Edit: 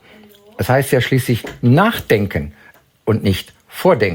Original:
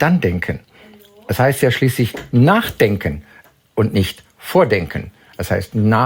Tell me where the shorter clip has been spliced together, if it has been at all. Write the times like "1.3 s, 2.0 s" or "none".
none